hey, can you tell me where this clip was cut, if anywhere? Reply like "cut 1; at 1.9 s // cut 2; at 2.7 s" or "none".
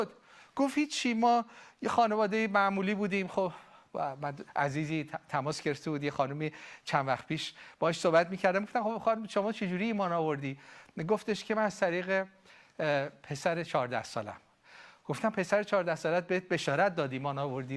cut 1; at 4.5 s

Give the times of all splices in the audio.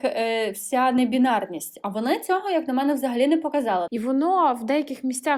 cut 1; at 3.9 s

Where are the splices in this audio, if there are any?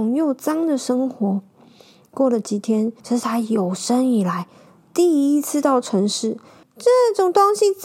cut 1; at 3.0 s // cut 2; at 6.6 s

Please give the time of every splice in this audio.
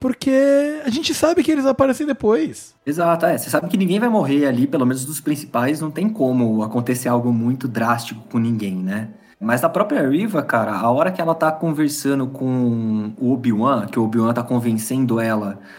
none

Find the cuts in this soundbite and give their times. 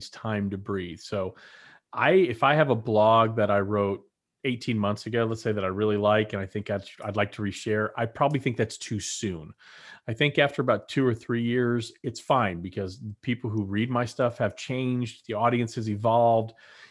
none

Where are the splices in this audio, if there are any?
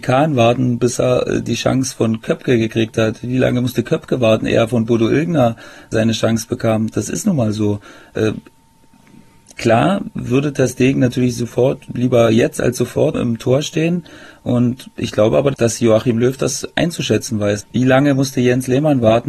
cut 1; at 13.1 s // cut 2; at 17.6 s

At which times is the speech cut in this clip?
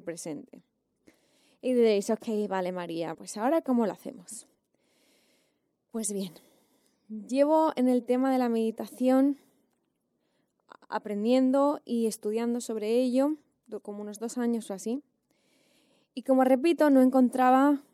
cut 1; at 3.1 s

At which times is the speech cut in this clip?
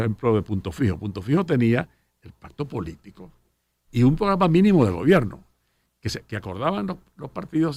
none

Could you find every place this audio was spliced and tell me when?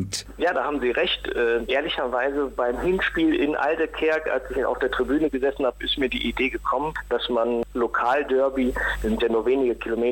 cut 1; at 1.6 s

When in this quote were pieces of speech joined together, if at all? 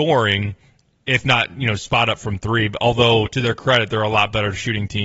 none

